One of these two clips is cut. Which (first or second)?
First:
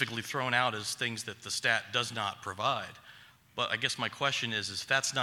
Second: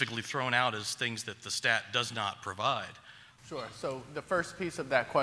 second